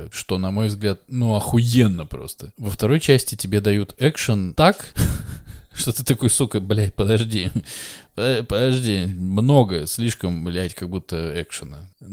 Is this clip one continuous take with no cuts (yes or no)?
yes